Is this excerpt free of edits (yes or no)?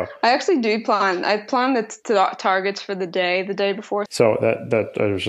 no